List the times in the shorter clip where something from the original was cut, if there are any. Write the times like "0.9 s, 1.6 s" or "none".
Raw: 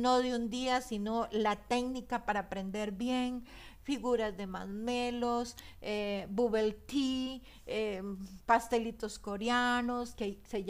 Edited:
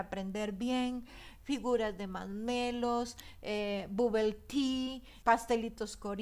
5.2 s